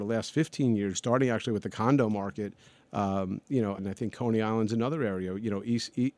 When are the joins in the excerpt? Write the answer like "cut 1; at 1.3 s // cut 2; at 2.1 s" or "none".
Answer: cut 1; at 0.9 s // cut 2; at 3.8 s